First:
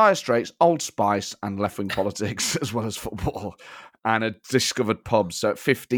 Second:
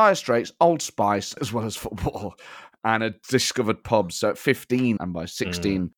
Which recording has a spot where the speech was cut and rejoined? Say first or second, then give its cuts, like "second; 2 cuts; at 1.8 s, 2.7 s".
second; 2 cuts; at 1.4 s, 5.0 s